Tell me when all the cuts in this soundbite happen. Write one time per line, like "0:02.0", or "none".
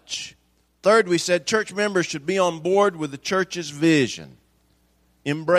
none